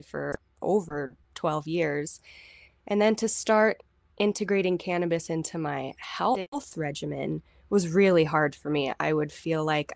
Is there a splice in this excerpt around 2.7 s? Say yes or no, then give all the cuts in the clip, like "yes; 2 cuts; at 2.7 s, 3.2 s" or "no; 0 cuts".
no; 0 cuts